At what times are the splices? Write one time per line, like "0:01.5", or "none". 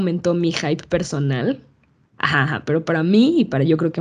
0:02.0